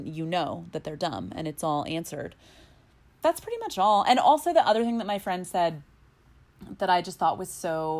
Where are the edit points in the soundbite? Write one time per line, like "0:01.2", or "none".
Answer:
none